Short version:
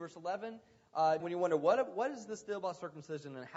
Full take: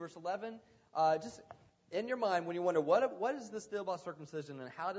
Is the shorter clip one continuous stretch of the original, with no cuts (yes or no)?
no